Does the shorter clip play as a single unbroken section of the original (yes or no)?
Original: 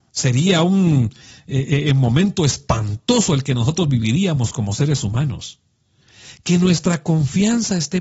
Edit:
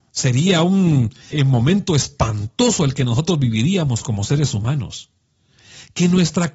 no